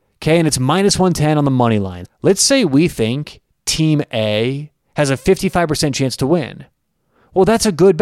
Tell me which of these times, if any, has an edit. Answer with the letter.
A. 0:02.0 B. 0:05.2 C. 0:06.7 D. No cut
A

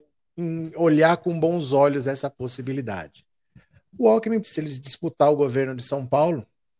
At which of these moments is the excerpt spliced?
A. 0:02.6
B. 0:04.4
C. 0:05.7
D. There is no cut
B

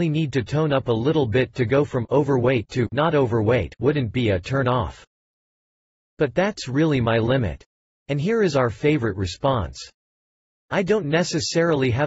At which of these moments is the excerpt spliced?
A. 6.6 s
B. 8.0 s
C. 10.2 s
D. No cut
B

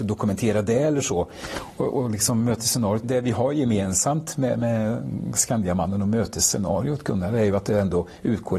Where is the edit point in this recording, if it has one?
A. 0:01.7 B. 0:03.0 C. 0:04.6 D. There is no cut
B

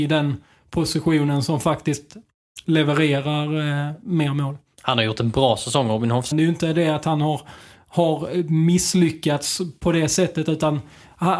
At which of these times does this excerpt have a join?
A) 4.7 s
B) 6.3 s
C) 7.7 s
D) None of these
B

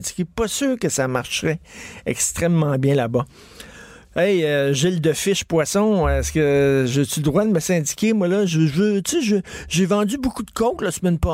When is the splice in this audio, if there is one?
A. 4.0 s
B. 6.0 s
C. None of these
A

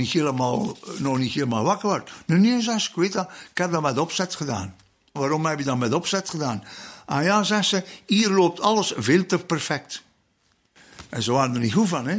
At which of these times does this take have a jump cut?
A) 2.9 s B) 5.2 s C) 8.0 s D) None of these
B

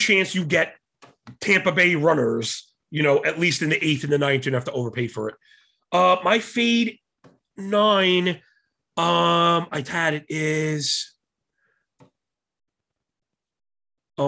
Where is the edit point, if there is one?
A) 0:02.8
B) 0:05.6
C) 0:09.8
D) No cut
C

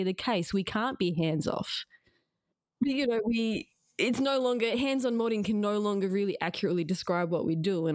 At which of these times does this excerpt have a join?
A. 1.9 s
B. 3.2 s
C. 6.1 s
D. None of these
D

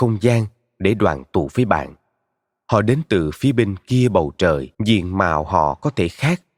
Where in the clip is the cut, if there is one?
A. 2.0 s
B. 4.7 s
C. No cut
B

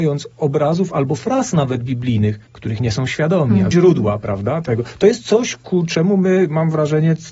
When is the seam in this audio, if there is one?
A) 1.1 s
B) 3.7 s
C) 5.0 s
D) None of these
B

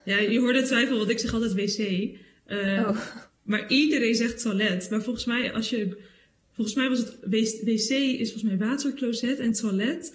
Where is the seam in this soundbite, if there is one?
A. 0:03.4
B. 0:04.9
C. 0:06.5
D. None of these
D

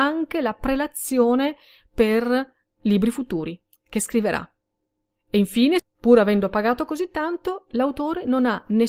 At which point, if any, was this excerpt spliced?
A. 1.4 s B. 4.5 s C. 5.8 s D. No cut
C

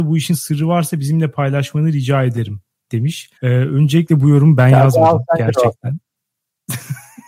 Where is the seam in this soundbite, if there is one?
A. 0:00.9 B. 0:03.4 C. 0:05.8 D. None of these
B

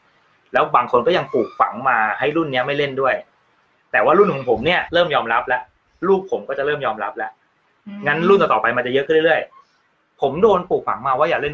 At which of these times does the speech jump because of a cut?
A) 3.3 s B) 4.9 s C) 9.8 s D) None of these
B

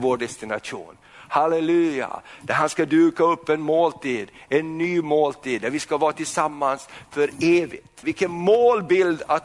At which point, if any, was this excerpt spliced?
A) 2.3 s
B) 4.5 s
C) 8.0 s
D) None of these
C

